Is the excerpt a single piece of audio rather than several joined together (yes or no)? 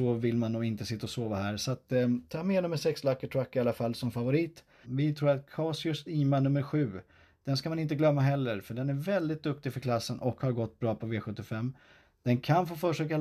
no